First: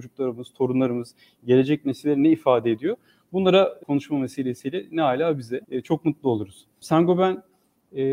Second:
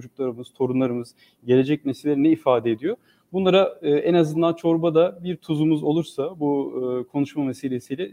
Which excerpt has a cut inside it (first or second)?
first